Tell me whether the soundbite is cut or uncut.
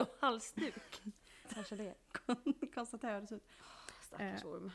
cut